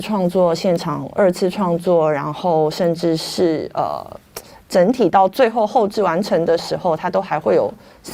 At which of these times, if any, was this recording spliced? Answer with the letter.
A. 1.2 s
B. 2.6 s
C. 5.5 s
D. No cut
D